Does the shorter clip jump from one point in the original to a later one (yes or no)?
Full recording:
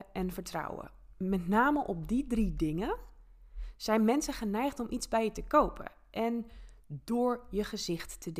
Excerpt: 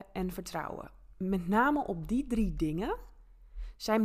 no